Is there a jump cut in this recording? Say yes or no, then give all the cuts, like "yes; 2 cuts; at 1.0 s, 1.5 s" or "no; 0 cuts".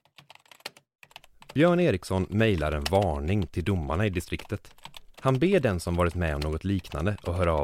yes; 1 cut; at 5.1 s